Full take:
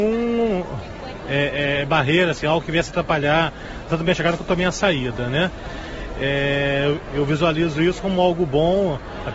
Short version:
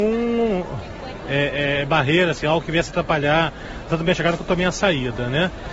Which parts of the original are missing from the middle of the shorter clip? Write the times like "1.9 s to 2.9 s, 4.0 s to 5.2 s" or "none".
none

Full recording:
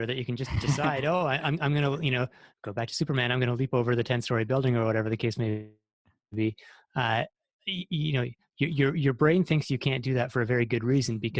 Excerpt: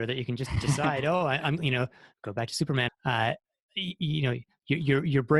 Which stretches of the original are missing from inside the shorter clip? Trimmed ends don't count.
1.6 s to 2.0 s, 3.3 s to 6.8 s

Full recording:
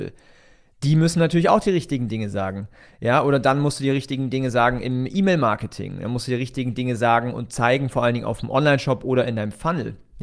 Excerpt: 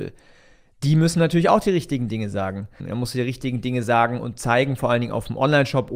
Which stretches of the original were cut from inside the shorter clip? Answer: 2.8 s to 5.9 s

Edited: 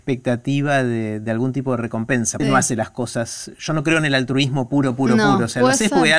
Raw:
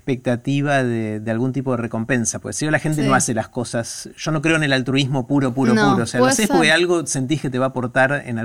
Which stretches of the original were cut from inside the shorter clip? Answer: 2.4 s to 3.0 s

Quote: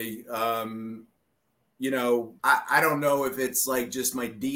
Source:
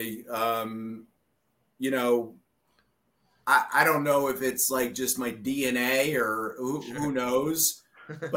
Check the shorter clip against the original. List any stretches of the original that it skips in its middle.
2.4 s to 3.4 s

